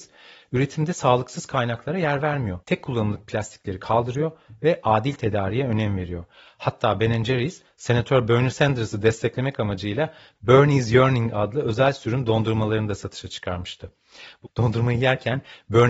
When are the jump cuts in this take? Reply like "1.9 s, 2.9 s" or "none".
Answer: 2.6 s, 14.5 s